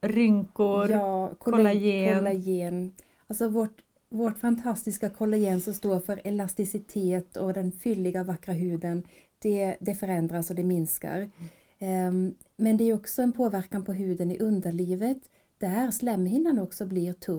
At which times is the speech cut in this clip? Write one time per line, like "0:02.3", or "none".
none